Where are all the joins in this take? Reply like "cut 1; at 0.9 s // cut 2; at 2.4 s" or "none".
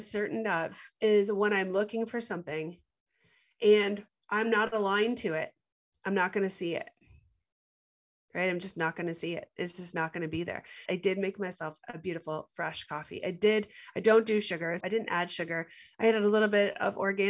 cut 1; at 10.9 s // cut 2; at 14.8 s